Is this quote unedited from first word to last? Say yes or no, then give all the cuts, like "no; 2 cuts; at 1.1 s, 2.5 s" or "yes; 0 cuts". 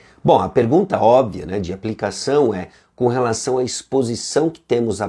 yes; 0 cuts